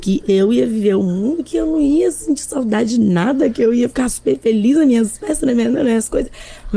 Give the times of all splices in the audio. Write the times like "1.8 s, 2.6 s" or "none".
none